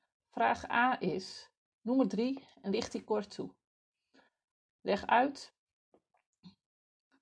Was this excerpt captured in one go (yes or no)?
yes